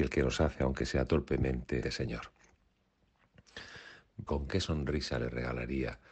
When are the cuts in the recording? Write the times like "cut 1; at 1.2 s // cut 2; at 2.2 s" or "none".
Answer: cut 1; at 1.8 s // cut 2; at 4.3 s